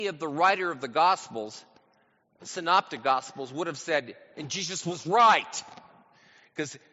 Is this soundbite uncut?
yes; 0 cuts

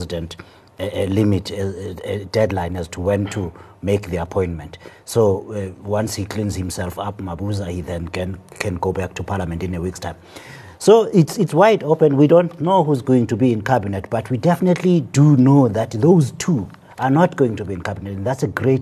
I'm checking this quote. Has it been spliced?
no; 0 cuts

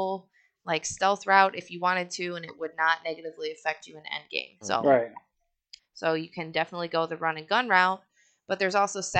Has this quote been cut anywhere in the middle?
yes; 2 cuts; at 4.6 s, 5.8 s

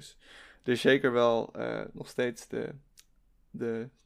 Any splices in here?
no; 0 cuts

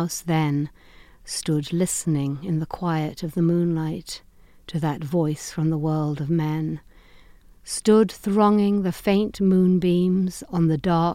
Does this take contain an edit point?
no; 0 cuts

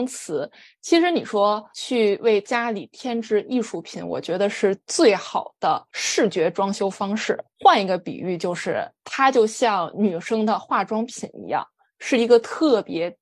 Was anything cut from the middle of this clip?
no; 0 cuts

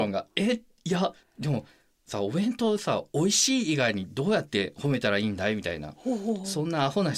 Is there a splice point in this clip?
no; 0 cuts

